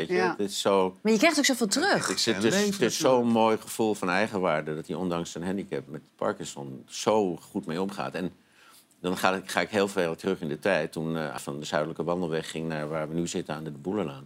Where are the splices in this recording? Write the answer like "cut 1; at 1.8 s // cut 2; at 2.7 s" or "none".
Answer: cut 1; at 5.9 s // cut 2; at 11.4 s

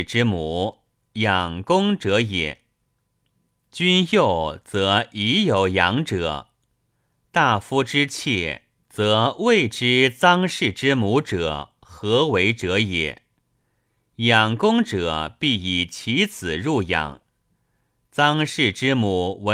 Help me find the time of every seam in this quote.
cut 1; at 8.8 s

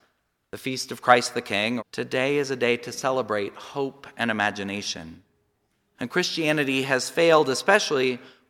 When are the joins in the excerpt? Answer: cut 1; at 1.8 s // cut 2; at 5.9 s

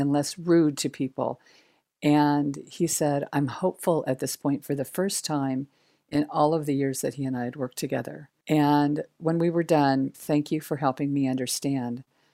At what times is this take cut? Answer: cut 1; at 10.1 s

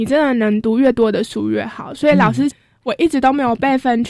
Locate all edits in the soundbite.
cut 1; at 2.8 s

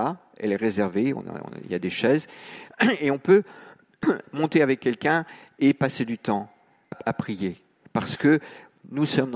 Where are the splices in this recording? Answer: cut 1; at 6.9 s

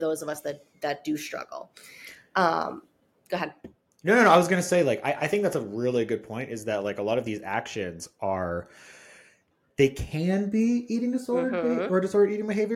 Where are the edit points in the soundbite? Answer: none

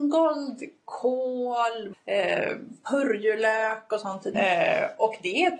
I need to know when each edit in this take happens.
cut 1; at 1.9 s // cut 2; at 4.3 s

